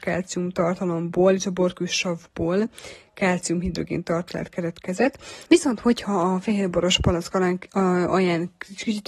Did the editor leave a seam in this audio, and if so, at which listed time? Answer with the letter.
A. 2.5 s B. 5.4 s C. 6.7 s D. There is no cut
B